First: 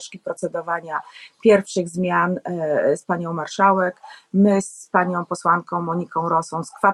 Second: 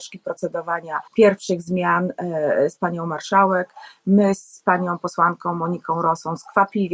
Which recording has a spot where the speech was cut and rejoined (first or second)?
second